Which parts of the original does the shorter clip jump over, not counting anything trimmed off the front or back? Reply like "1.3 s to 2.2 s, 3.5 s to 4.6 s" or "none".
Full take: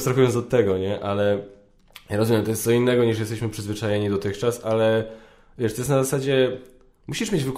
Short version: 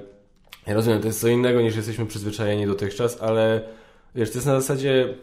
none